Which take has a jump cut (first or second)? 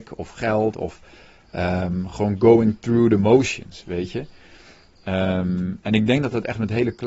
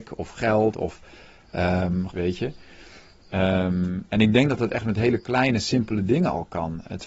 second